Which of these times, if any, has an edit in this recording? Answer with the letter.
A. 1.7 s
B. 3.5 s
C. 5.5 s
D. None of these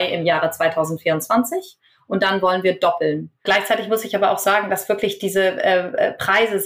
B